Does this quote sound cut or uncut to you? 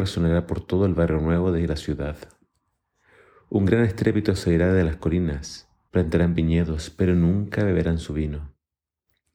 cut